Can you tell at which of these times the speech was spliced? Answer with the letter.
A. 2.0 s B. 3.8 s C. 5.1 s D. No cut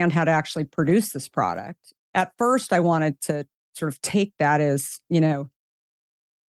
A